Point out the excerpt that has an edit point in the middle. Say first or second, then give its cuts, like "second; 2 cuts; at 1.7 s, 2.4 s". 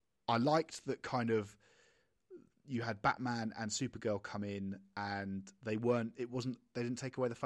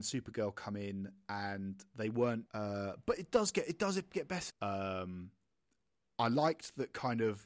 second; 2 cuts; at 2.5 s, 4.5 s